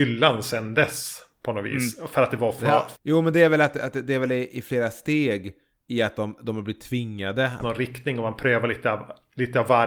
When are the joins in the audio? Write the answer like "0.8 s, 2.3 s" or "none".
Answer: 3.0 s, 7.6 s